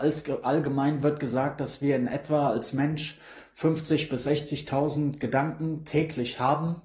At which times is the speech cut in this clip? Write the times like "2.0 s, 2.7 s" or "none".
none

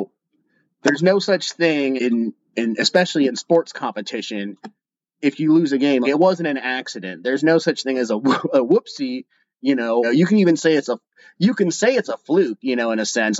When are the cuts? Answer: 2.0 s, 6.0 s, 10.0 s

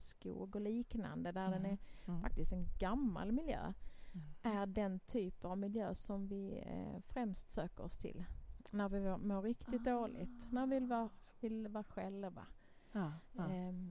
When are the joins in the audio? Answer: none

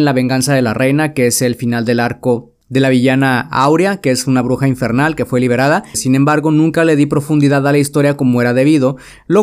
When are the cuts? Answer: 5.9 s

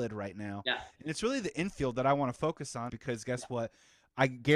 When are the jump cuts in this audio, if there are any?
2.9 s

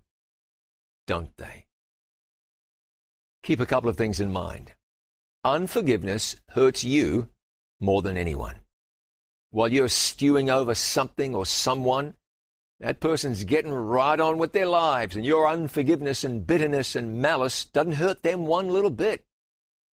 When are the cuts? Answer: none

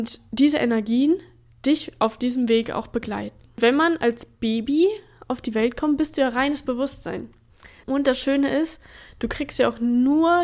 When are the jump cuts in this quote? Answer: 7.8 s

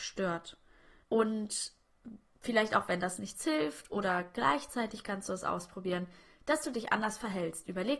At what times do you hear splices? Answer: 1.0 s

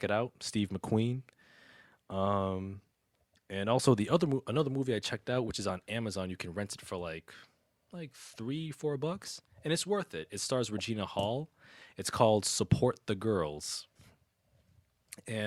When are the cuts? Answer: none

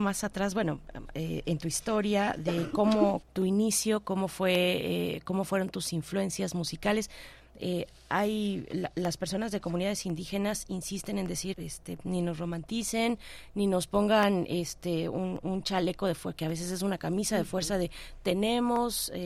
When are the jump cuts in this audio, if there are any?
3.2 s, 11.5 s

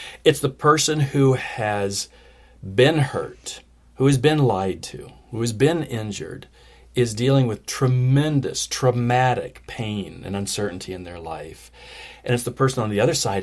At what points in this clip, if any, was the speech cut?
none

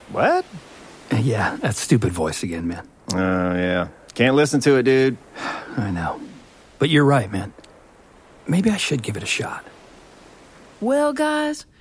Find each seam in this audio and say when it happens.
none

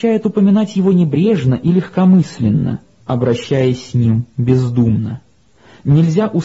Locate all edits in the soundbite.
3.0 s

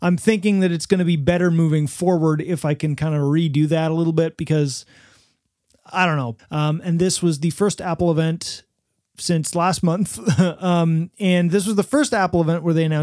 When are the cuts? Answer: 6.4 s

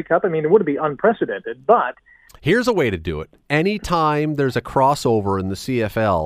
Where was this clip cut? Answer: 2.3 s

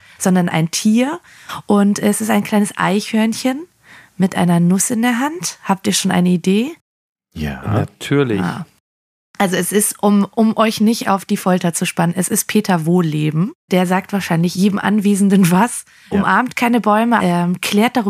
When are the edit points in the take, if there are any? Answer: 16.1 s, 17.2 s

